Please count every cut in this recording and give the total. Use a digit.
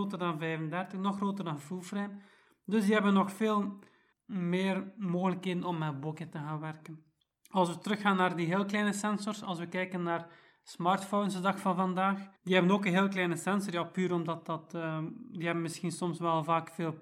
2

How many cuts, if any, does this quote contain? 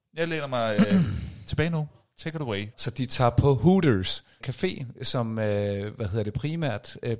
2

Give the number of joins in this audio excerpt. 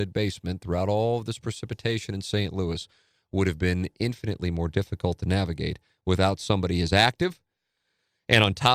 0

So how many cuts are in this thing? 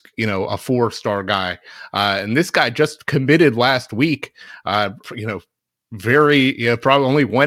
1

